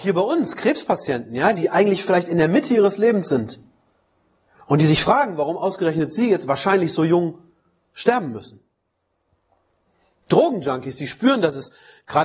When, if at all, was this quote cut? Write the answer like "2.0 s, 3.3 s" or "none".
none